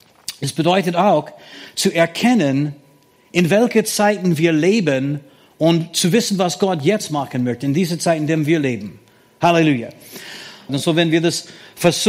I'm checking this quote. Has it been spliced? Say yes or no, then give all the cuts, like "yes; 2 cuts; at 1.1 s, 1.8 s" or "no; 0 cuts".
yes; 1 cut; at 10.7 s